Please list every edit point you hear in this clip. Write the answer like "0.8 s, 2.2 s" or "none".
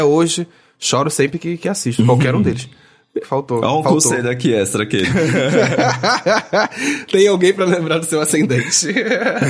3.2 s, 5.1 s